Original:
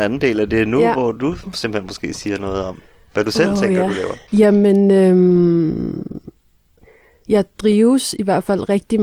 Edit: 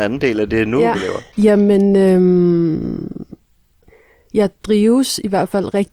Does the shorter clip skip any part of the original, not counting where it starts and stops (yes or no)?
yes